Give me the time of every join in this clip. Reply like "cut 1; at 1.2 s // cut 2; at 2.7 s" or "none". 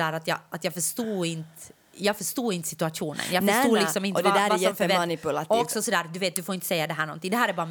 none